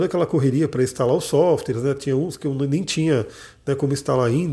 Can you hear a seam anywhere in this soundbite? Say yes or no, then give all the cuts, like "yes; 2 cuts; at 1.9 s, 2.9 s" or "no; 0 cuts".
no; 0 cuts